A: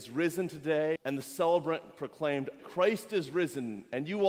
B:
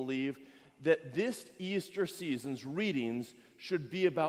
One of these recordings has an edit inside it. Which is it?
A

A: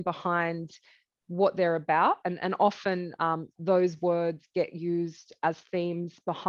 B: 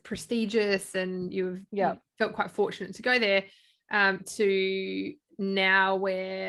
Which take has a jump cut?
A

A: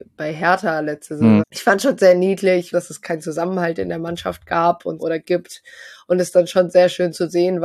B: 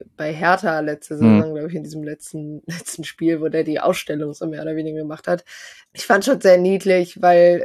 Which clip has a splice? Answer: A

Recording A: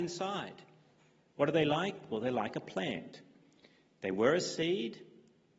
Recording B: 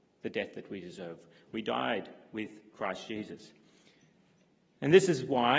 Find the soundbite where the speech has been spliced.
A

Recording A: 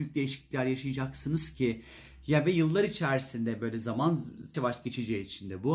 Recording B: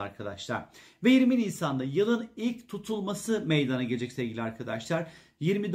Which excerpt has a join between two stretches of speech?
A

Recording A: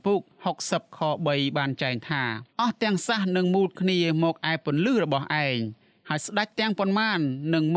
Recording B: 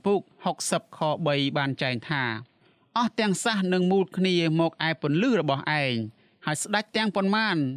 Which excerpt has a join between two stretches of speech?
A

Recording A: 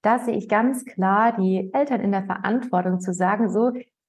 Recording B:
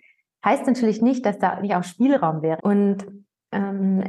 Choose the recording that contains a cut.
B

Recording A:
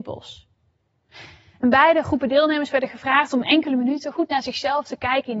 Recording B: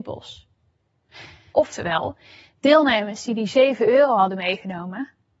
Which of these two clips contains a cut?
B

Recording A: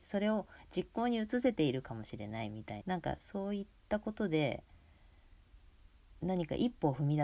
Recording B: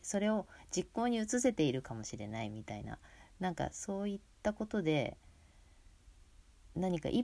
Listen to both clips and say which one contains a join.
A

